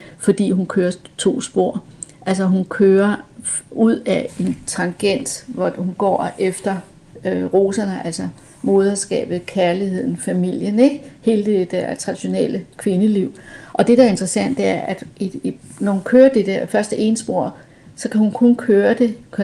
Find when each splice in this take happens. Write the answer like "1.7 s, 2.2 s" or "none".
13.7 s